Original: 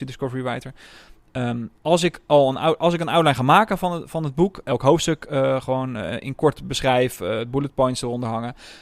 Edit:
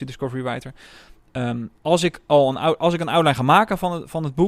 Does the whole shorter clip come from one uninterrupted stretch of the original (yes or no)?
yes